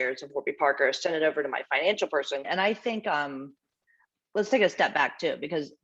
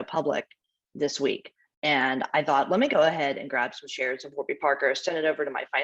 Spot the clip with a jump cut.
first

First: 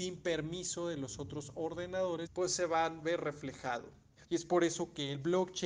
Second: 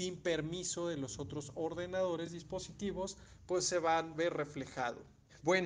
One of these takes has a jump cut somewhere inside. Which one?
first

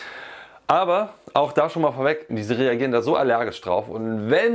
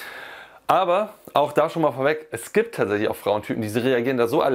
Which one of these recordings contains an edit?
first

